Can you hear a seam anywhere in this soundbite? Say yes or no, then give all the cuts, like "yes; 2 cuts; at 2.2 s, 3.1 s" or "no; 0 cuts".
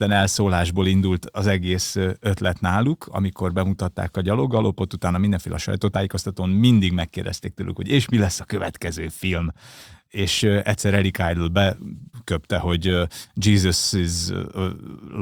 no; 0 cuts